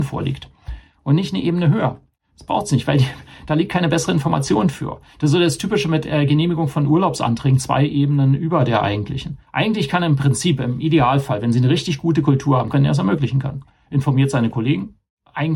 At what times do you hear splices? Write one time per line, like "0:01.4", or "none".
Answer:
0:09.4
0:12.7